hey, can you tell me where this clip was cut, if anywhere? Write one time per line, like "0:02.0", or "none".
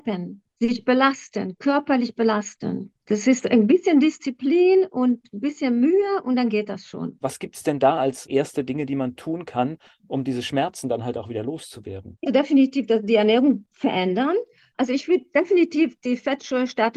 0:07.2
0:12.3

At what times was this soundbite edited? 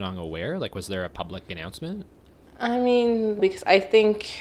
0:03.4

